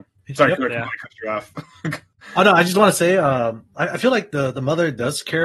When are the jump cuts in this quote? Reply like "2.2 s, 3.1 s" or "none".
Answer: none